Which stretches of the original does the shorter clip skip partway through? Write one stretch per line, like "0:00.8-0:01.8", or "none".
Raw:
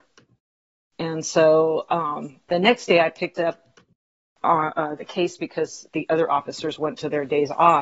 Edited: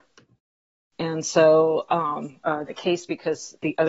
0:02.4-0:04.7